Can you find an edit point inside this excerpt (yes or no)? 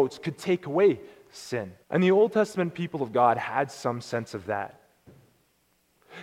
yes